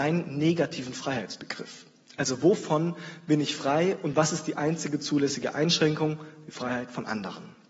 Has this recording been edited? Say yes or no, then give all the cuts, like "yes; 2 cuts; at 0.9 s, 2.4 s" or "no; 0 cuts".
no; 0 cuts